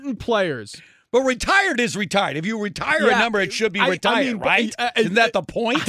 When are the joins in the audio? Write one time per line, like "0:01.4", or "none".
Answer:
none